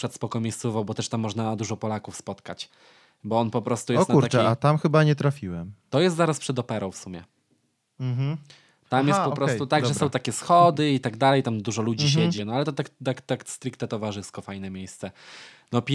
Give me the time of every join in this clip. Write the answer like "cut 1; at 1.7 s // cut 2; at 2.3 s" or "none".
cut 1; at 12.4 s